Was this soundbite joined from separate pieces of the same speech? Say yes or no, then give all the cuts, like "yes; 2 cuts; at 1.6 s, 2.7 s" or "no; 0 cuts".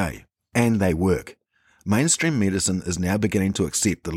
no; 0 cuts